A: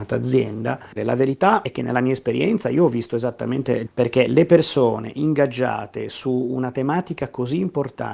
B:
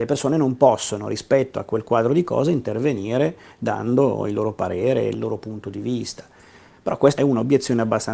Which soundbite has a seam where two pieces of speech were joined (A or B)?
A